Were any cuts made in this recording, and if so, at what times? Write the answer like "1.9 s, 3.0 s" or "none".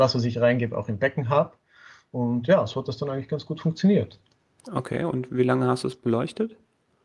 none